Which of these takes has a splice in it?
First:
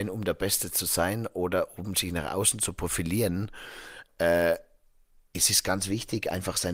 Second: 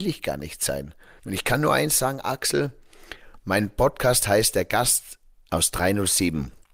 second; 1 cut; at 1.2 s

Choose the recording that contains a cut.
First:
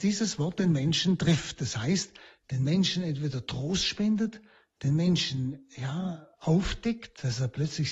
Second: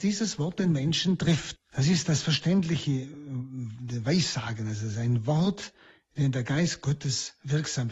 second; 1 cut; at 1.6 s

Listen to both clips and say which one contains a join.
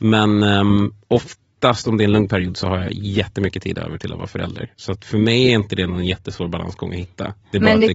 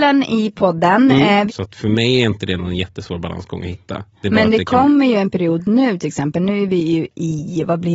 second; 1 cut; at 1.5 s

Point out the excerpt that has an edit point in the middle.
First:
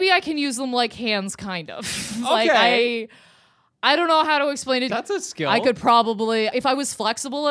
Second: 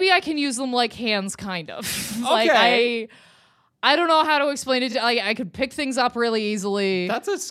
first; 2 cuts; at 4.9 s, 6.5 s

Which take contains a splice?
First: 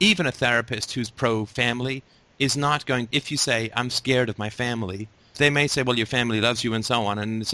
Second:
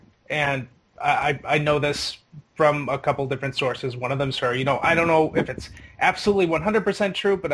first; 2 cuts; at 3.1 s, 5.3 s

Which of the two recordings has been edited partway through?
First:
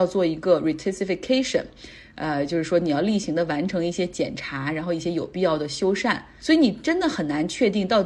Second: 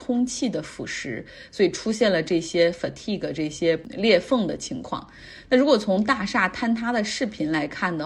first; 1 cut; at 6.4 s

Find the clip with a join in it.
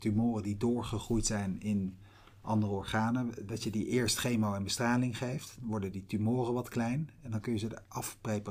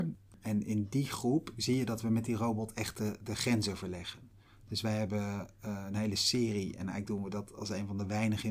first; 1 cut; at 3.5 s

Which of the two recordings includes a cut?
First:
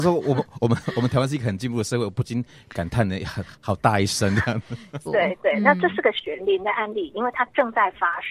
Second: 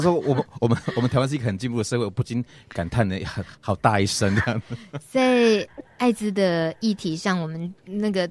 first; 2 cuts; at 5.0 s, 6.4 s

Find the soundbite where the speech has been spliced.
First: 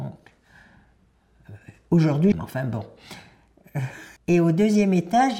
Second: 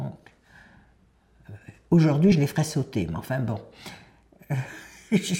first; 2 cuts; at 2.3 s, 4.2 s

